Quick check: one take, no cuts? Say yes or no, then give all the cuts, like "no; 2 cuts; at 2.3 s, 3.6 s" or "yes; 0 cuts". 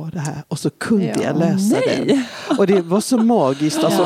yes; 0 cuts